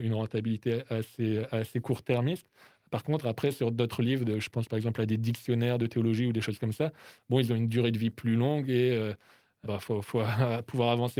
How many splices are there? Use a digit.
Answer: 1